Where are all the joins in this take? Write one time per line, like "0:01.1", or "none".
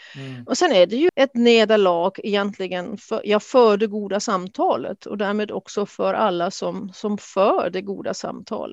0:01.1